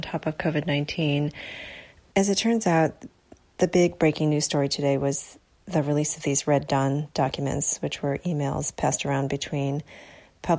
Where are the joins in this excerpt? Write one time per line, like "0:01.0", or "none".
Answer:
0:02.0